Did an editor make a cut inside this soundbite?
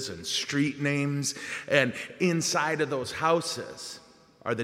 no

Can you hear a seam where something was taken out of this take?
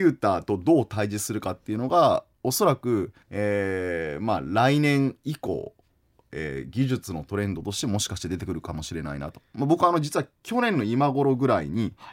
yes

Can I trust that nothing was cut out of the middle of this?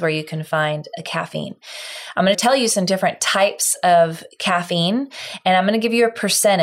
yes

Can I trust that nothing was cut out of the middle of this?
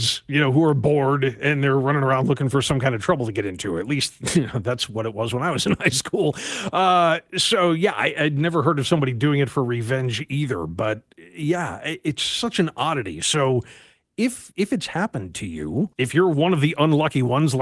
no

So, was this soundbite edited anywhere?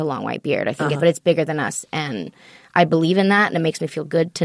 yes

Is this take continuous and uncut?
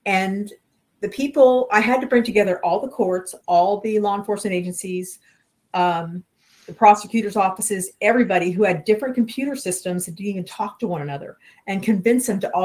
no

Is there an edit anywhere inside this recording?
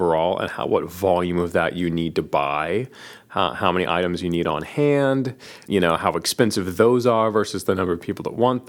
yes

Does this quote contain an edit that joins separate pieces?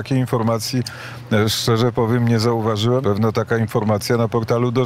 yes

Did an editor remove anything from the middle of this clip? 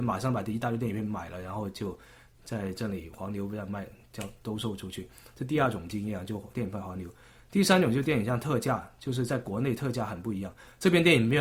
no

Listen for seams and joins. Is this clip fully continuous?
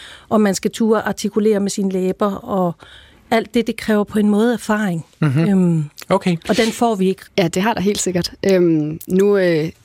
no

